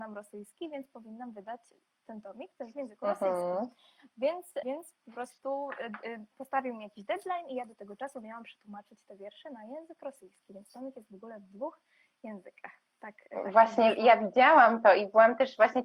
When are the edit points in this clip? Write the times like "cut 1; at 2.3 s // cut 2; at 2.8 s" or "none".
cut 1; at 4.6 s